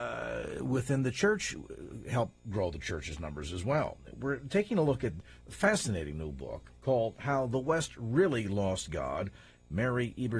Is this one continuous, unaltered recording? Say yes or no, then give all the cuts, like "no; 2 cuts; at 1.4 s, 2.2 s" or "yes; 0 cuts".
yes; 0 cuts